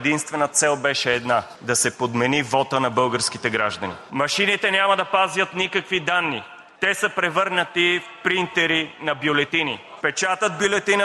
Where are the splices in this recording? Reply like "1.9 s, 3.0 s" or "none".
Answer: 4.1 s